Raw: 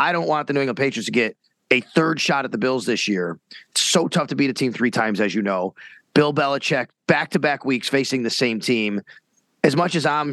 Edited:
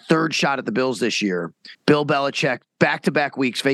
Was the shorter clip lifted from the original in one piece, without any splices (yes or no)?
no